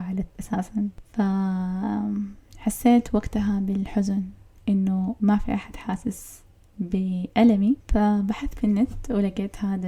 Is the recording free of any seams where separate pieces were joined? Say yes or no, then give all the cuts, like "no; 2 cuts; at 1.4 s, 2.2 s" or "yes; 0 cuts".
yes; 0 cuts